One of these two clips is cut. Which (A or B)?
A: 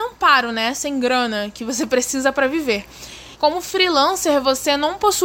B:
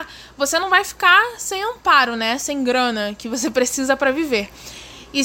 A